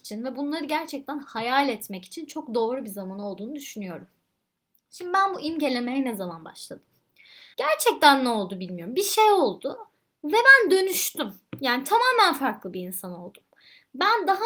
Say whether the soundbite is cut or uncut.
cut